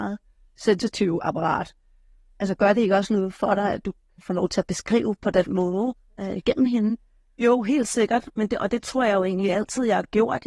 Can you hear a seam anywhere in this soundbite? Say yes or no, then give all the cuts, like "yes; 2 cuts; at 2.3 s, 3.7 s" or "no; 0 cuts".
no; 0 cuts